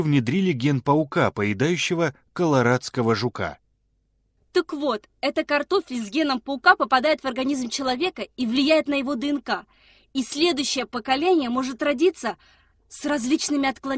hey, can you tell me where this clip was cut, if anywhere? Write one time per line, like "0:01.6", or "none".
none